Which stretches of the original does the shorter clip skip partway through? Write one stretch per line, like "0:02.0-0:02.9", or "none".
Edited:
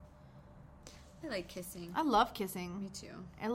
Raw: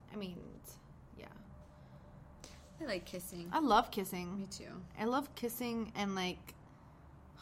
none